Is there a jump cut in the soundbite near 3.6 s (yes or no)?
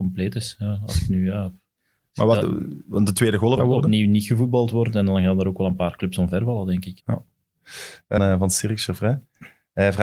yes